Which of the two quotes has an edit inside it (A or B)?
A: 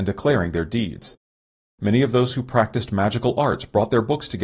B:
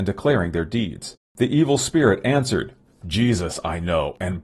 B